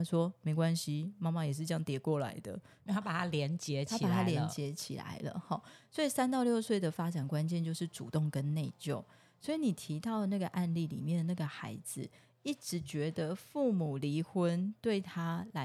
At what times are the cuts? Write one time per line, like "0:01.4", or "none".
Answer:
0:02.9